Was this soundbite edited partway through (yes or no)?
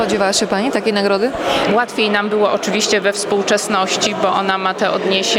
yes